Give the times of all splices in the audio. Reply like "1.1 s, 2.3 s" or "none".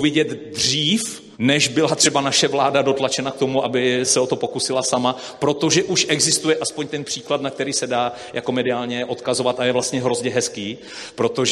1.3 s, 4.0 s